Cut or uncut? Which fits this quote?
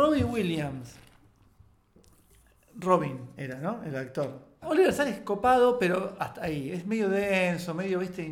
cut